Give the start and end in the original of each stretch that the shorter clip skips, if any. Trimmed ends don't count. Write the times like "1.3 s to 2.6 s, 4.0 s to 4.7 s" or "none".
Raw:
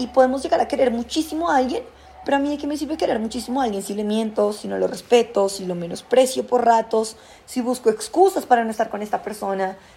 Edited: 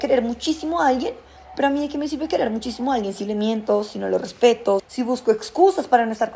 5.5 s to 7.4 s